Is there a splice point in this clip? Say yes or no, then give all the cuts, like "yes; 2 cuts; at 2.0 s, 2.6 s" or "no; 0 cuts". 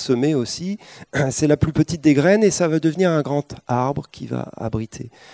no; 0 cuts